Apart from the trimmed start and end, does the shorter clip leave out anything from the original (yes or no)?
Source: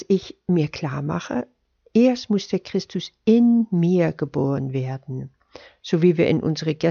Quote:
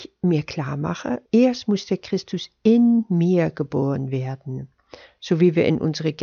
yes